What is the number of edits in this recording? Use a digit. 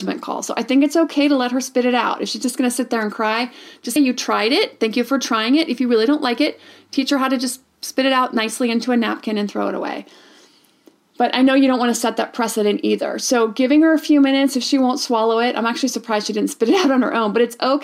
1